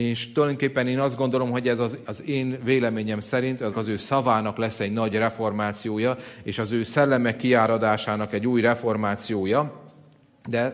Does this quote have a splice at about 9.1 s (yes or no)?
no